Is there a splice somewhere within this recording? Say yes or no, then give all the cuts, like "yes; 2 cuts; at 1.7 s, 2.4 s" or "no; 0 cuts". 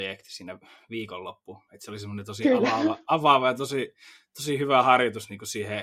no; 0 cuts